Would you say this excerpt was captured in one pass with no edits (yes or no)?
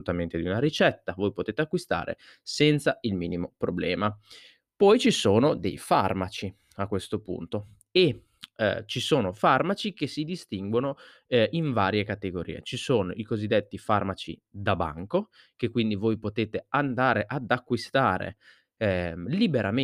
yes